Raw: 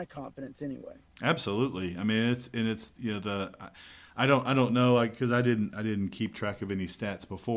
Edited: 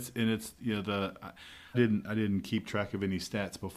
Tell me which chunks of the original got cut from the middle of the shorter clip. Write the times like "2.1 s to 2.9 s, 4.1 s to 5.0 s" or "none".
4.1 s to 5.4 s